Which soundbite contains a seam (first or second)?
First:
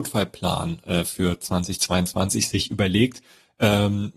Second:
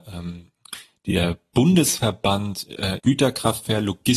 second